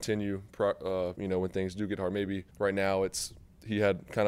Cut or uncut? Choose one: cut